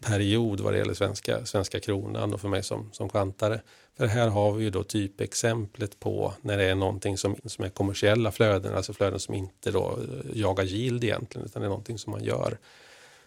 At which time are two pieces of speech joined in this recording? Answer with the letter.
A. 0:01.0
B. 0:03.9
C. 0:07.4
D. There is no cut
C